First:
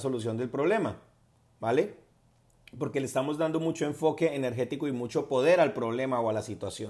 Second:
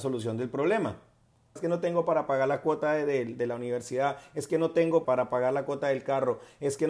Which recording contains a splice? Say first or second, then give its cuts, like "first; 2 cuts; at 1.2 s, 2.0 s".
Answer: second; 2 cuts; at 1.6 s, 5.0 s